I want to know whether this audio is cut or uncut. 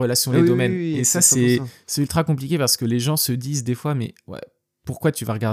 uncut